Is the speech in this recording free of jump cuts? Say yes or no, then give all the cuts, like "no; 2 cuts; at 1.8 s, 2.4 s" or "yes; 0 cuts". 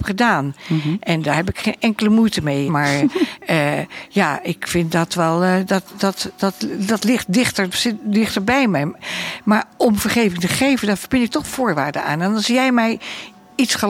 no; 1 cut; at 2.7 s